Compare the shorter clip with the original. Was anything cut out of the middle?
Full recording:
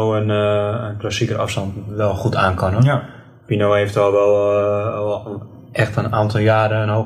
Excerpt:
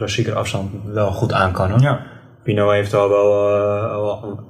no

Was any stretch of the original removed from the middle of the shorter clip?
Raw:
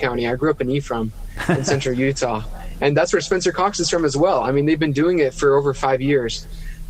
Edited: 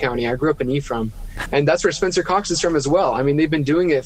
yes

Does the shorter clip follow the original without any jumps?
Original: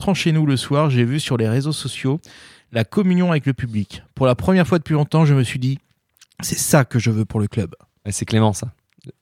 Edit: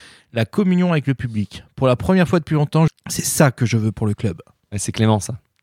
no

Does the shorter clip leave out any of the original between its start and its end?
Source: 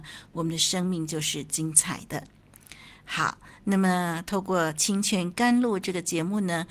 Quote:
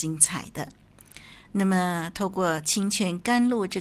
yes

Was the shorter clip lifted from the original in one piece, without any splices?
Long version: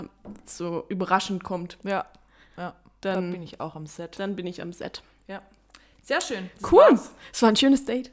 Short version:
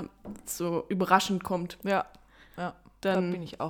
yes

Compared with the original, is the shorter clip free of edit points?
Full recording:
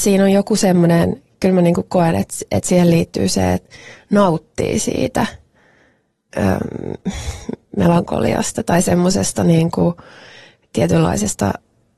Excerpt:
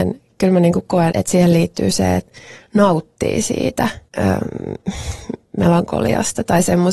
no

